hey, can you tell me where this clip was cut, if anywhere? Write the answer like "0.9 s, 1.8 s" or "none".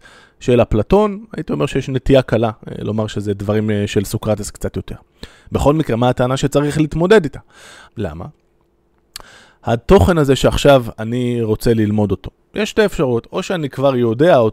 7.9 s

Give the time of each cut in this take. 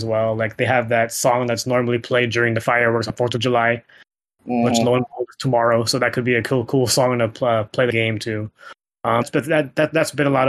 9.2 s

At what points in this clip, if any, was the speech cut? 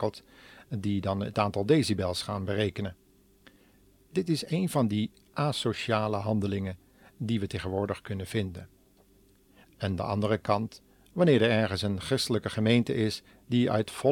9.6 s

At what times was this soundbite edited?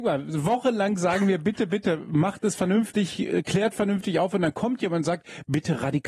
1.7 s

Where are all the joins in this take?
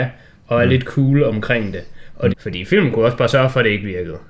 2.3 s

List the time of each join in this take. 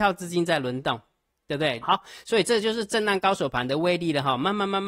1.8 s

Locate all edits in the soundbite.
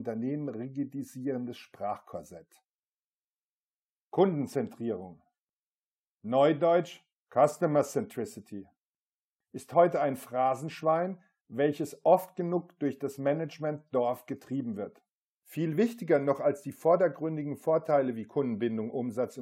15.4 s

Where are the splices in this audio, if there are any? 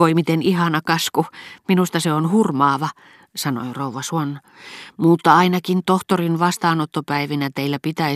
none

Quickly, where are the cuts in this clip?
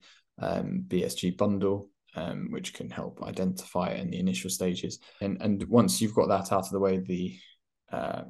5.2 s

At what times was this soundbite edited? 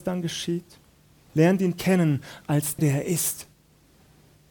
1.3 s, 2.8 s

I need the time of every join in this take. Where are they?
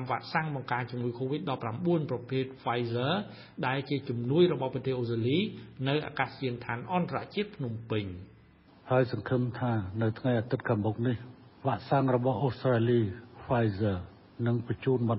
none

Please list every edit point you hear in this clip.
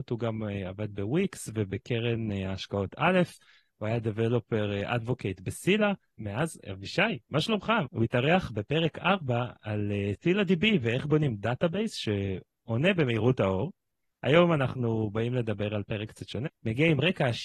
7.8 s, 16.5 s

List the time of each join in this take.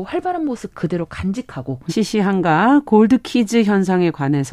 1.9 s

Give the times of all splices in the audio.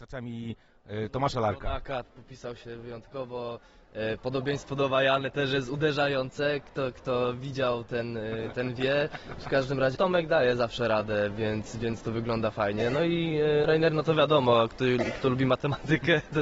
2.0 s, 10.0 s

